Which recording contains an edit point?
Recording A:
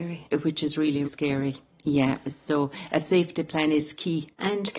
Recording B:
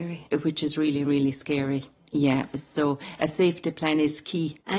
A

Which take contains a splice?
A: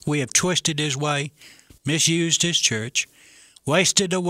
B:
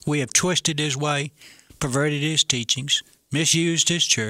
A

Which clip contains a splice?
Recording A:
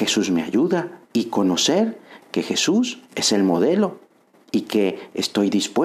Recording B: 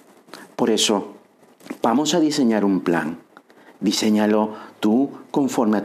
A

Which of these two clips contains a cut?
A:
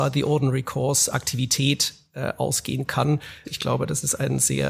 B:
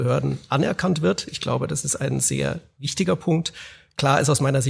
A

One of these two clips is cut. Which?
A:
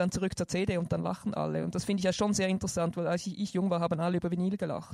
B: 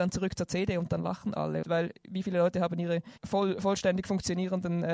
B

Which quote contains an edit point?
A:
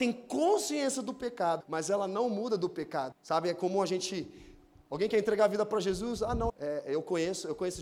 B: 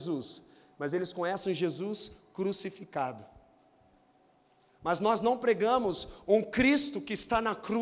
A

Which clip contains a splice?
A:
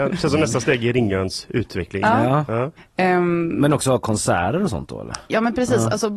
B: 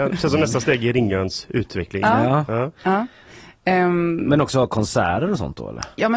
A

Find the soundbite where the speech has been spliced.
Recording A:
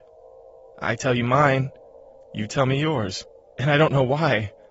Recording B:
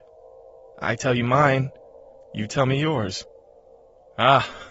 A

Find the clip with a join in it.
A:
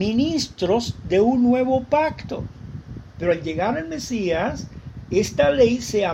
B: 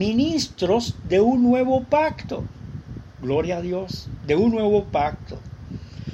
A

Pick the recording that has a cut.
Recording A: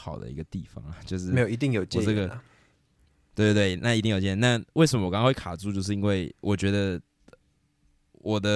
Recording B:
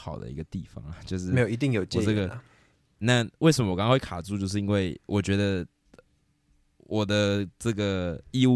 B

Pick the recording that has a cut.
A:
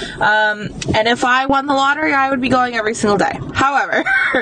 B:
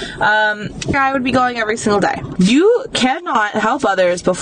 B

